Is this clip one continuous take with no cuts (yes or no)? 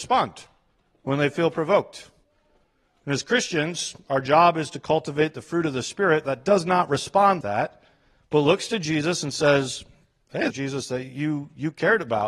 no